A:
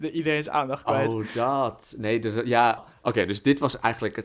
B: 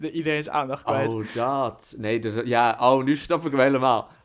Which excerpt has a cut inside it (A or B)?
A